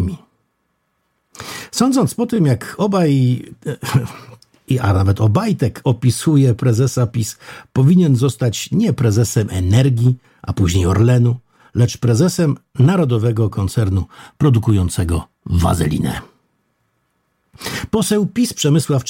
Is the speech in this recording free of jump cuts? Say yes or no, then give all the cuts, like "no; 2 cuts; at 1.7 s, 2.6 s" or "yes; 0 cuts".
yes; 0 cuts